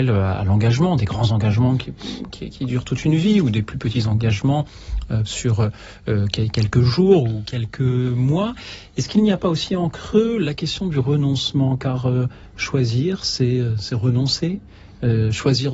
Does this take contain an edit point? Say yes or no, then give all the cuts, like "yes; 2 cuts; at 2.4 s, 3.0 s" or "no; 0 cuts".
no; 0 cuts